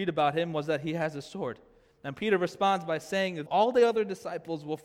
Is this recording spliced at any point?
yes; 2 cuts; at 1.9 s, 3.4 s

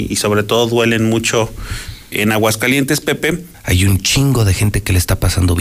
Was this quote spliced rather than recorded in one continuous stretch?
yes; 2 cuts; at 2.1 s, 3.5 s

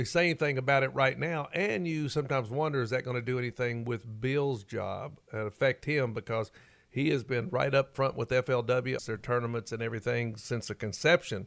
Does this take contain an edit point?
yes; 1 cut; at 9.0 s

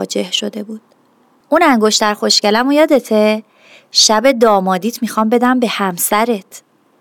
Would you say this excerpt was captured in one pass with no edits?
no; 1 cut; at 1.4 s

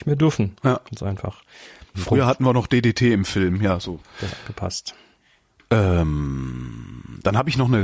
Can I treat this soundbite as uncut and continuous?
no; 2 cuts; at 1.9 s, 4.0 s

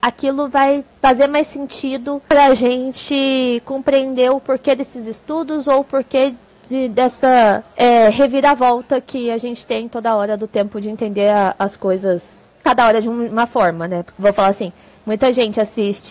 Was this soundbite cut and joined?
no; 0 cuts

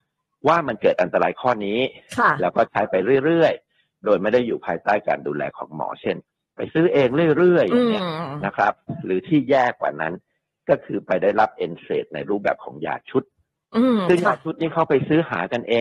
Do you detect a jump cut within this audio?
no; 0 cuts

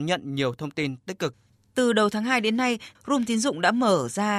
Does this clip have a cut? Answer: yes; 1 cut; at 2.9 s

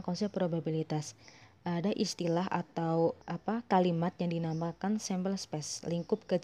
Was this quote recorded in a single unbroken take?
no; 1 cut; at 3.2 s

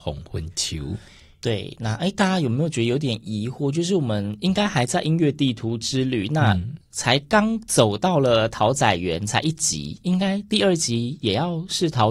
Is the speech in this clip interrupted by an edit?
no; 0 cuts

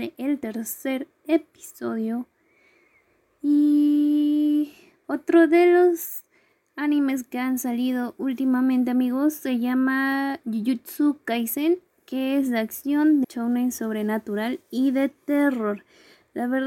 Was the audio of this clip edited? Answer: yes; 2 cuts; at 5.0 s, 13.2 s

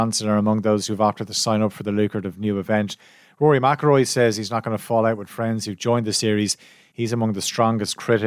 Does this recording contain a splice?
no; 0 cuts

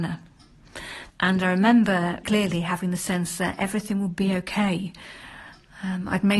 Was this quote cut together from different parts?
yes; 2 cuts; at 1.1 s, 2.2 s

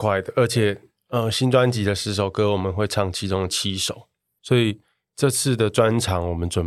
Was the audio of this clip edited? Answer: yes; 1 cut; at 4.4 s

